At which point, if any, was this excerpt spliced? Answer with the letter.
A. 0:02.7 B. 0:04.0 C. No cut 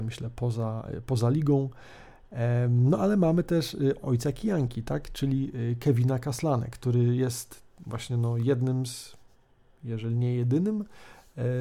B